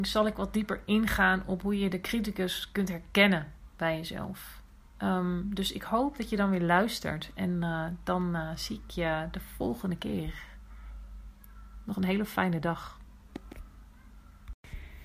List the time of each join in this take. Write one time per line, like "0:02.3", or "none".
none